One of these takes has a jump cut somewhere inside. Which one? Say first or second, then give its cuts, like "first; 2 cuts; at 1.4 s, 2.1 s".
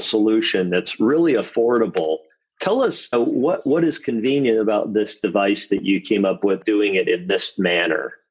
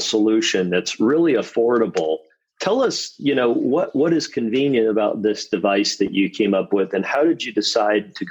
first; 2 cuts; at 3.1 s, 6.6 s